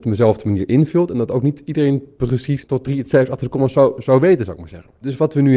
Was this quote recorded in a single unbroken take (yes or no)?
yes